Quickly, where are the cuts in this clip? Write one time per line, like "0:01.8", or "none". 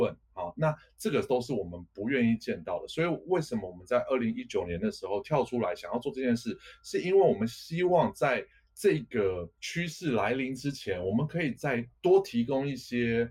none